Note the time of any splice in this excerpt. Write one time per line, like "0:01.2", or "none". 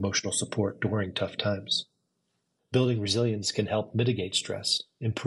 0:02.6